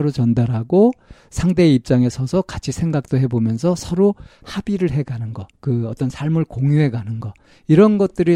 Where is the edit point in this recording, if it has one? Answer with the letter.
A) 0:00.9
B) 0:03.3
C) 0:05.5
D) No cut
C